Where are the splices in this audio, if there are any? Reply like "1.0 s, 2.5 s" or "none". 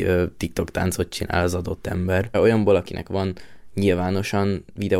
2.3 s